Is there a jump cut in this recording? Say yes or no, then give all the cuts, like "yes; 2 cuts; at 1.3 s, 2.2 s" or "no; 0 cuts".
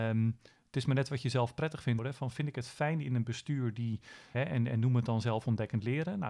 yes; 2 cuts; at 2.0 s, 4.3 s